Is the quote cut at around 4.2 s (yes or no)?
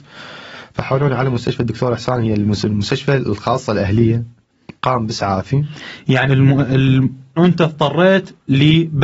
no